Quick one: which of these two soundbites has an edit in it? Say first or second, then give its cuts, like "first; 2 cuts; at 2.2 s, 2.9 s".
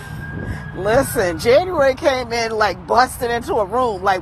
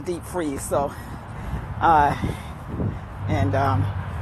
second; 1 cut; at 3.2 s